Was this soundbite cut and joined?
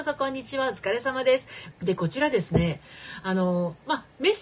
yes; 1 cut; at 1.7 s

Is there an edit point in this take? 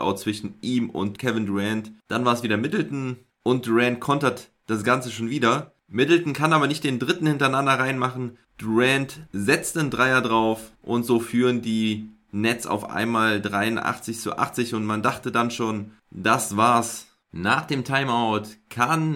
yes; 2 cuts; at 2.0 s, 17.2 s

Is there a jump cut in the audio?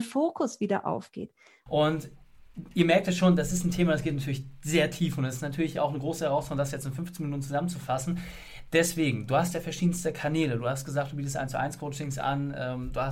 yes; 1 cut; at 1.7 s

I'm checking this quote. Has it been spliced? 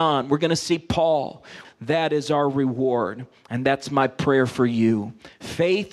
yes; 1 cut; at 1.6 s

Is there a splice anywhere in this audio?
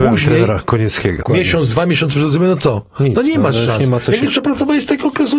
yes; 1 cut; at 1.2 s

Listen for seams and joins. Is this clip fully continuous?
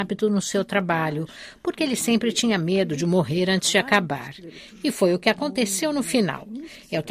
yes; 0 cuts

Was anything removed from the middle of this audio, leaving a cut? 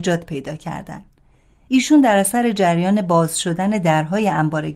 no; 0 cuts

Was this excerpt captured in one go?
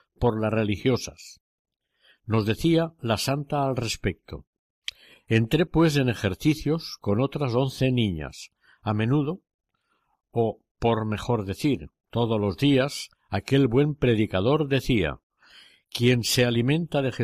yes; 0 cuts

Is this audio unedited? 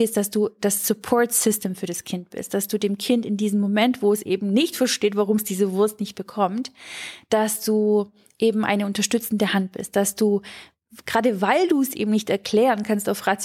yes; 0 cuts

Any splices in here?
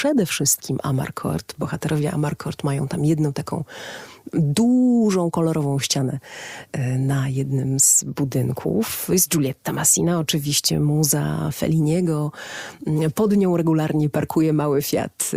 no; 0 cuts

